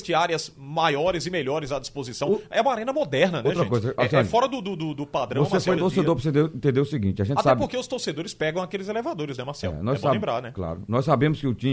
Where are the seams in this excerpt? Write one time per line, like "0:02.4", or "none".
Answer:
0:05.8